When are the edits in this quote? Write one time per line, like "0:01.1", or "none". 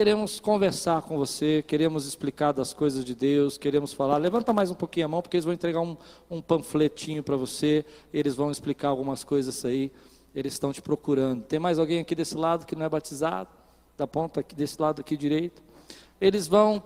none